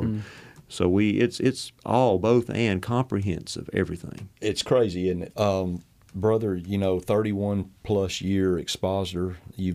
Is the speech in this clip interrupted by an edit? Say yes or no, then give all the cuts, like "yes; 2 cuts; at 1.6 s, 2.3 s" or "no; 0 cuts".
yes; 2 cuts; at 4.3 s, 5.3 s